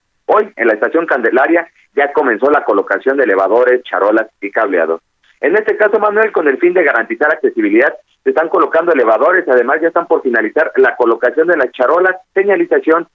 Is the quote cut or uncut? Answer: uncut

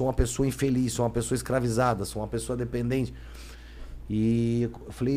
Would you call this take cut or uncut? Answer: uncut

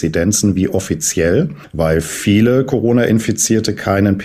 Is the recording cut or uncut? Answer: uncut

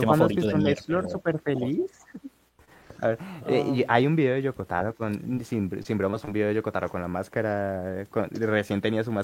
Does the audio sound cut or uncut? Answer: uncut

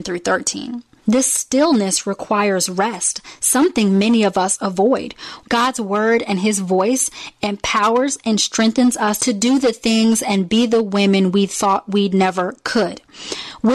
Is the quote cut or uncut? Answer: cut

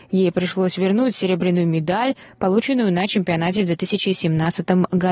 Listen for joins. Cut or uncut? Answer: uncut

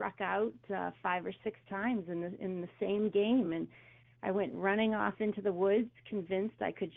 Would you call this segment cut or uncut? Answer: uncut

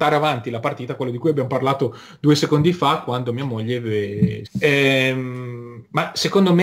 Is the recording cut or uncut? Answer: cut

